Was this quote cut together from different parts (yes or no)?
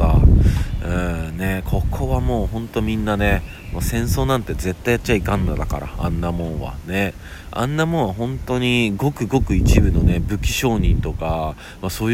no